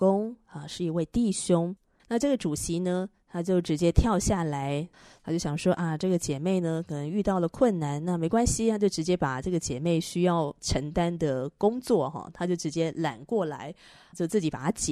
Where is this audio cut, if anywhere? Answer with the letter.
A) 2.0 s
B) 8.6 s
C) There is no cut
A